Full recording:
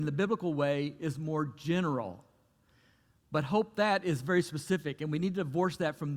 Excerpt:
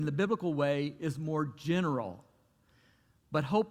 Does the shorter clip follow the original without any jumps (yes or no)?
yes